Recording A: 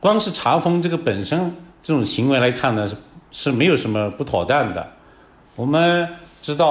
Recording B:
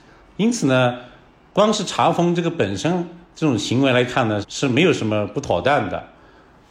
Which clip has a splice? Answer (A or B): B